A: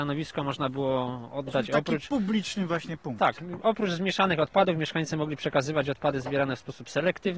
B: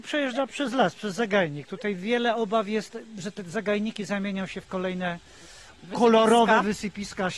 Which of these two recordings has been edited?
B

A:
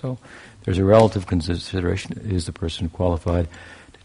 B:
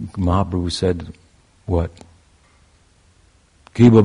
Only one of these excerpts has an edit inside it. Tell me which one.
A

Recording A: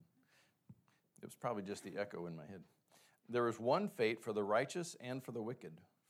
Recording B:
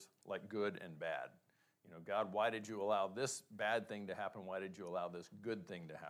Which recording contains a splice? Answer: A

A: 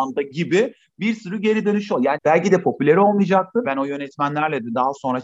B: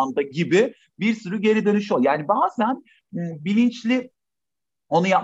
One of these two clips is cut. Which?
A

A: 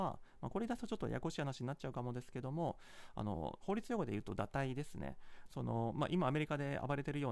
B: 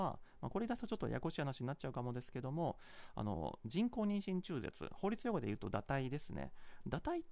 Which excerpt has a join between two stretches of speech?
A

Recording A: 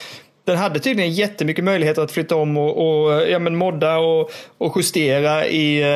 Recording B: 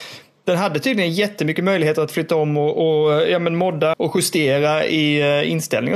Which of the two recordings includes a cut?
B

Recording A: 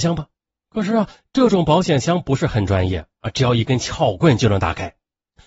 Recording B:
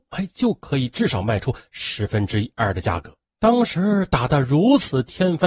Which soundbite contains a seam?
B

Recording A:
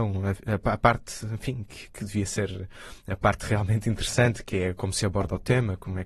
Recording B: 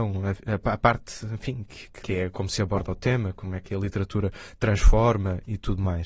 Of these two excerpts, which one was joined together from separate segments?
B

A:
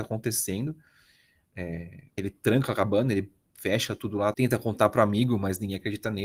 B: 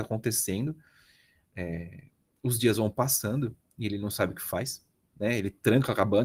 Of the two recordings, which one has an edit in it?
A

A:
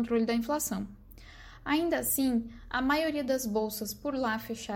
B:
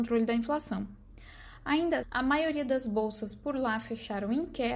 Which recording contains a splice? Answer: B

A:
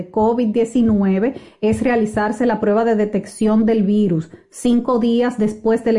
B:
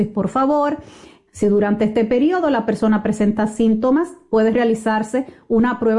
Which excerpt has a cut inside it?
B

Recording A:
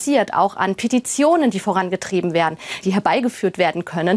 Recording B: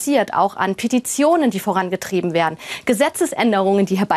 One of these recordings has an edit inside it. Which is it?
A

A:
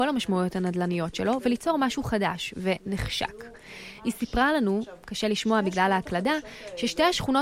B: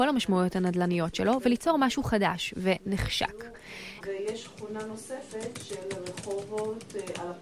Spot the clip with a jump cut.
B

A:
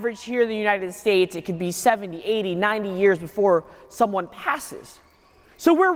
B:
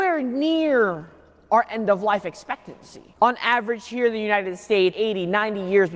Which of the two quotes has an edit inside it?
B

